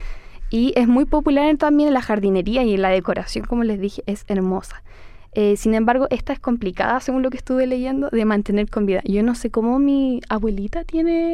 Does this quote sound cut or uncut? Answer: uncut